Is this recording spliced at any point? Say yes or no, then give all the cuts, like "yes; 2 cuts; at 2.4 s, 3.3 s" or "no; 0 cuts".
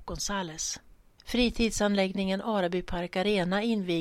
yes; 1 cut; at 1.1 s